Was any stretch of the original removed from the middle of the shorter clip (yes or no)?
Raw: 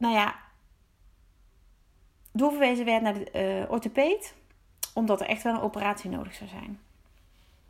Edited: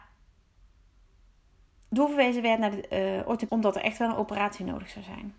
yes